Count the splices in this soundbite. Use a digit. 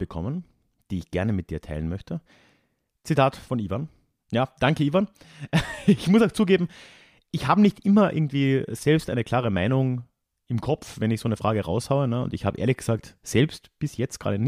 1